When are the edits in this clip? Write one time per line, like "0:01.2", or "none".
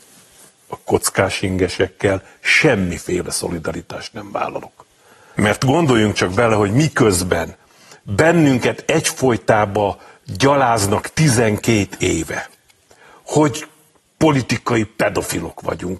0:05.3